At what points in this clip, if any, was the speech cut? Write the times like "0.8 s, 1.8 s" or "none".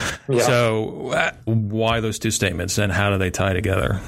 1.5 s